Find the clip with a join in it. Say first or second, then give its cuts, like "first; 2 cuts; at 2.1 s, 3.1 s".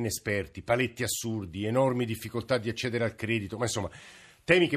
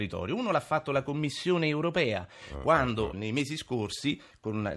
second; 1 cut; at 3.1 s